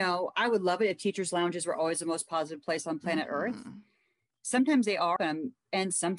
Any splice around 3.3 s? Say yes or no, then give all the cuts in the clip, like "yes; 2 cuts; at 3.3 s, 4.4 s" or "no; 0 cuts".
no; 1 cut; at 5.2 s